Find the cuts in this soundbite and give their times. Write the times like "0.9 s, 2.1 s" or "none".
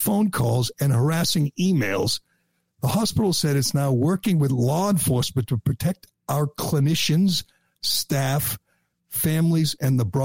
none